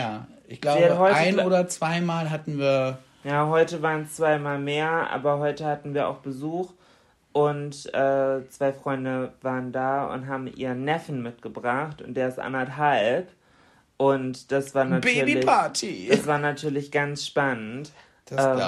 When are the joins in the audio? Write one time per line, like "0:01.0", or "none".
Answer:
none